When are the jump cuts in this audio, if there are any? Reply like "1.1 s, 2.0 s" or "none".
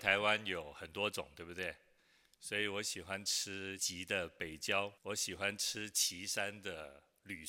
3.8 s, 5.0 s

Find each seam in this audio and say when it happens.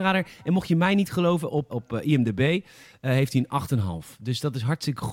1.7 s

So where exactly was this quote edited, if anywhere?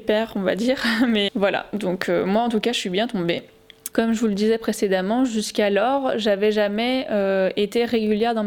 1.3 s, 3.9 s

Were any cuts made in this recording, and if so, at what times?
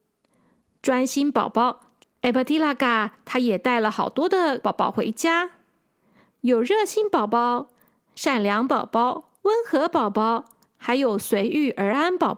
2.0 s, 9.4 s

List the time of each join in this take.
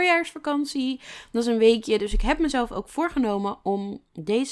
none

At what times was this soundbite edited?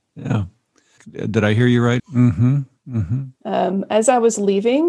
1.0 s, 2.0 s, 3.4 s

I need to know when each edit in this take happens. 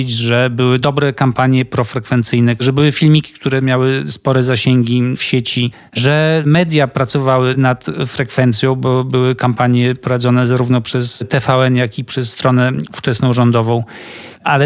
none

